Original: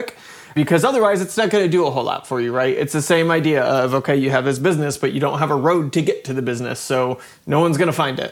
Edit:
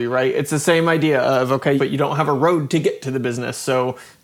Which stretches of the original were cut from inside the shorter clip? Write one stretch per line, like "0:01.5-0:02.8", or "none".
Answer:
0:04.2-0:05.0